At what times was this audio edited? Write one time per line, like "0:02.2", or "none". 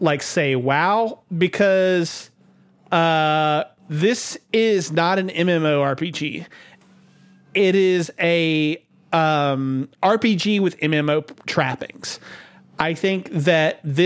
none

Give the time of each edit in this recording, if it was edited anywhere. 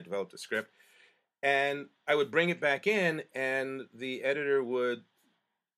none

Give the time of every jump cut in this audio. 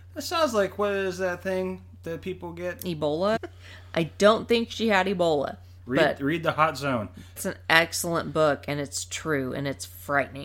0:03.4
0:07.4

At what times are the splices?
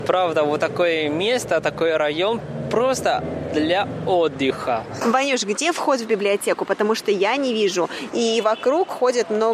0:08.1

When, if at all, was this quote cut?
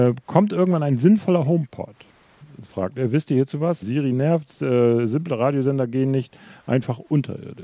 0:03.8

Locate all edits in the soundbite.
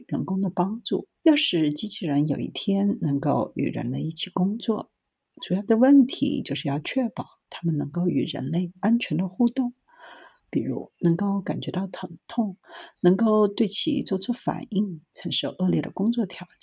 0:01.2
0:10.4

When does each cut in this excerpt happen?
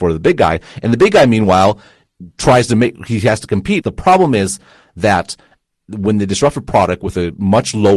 0:03.8

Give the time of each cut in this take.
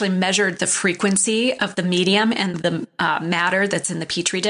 0:02.5

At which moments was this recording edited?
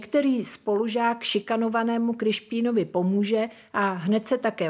none

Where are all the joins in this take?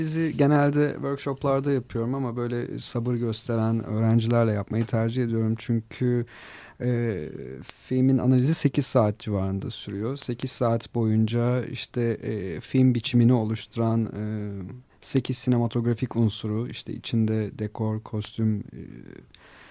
none

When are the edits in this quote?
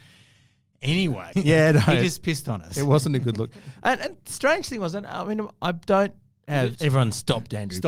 0:01.3
0:06.8

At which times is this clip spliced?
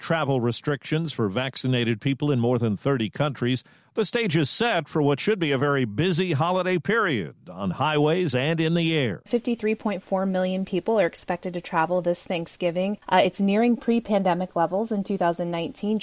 none

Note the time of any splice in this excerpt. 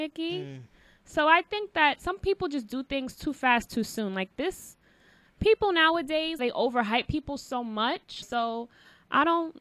0:06.4
0:08.2

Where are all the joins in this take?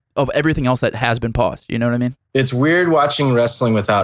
0:02.3

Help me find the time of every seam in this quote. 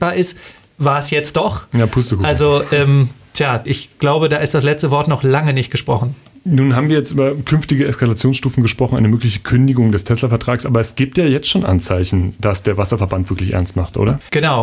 none

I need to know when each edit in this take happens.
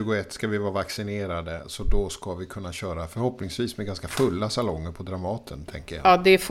none

